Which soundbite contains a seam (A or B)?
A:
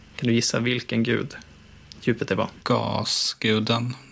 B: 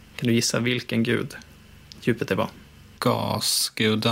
A